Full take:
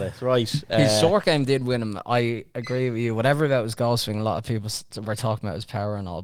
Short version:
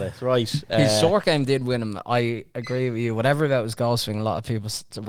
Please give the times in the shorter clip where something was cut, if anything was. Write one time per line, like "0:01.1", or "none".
none